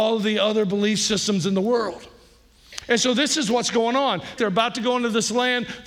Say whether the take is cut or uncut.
cut